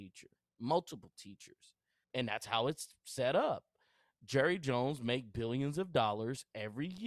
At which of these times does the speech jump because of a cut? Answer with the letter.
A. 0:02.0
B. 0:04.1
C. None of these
A